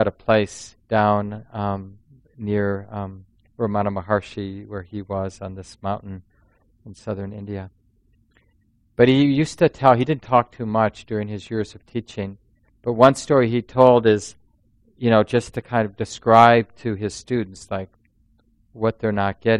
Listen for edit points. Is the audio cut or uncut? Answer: uncut